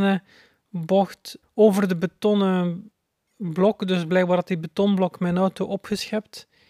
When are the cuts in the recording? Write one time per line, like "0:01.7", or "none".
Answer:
0:01.4